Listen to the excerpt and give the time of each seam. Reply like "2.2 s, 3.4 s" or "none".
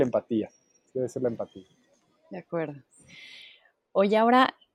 none